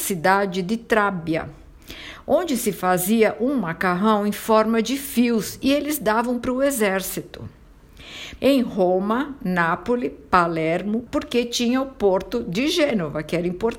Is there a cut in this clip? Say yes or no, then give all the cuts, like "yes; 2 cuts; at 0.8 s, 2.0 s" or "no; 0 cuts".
yes; 2 cuts; at 8.4 s, 11.1 s